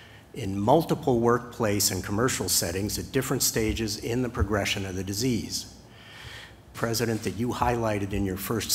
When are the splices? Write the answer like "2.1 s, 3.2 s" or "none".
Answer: 6.7 s